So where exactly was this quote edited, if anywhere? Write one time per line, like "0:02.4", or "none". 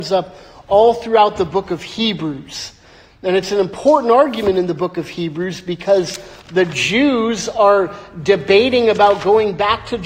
none